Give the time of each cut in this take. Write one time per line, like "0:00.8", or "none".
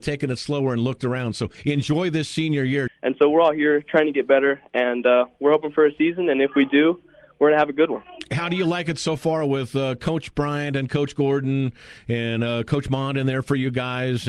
0:02.9